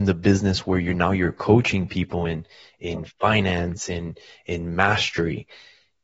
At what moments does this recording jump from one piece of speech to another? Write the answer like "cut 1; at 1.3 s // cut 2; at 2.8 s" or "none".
none